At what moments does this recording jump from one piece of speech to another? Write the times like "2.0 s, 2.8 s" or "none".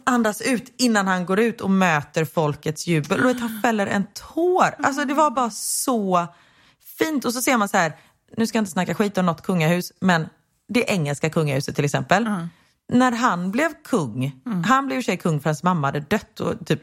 none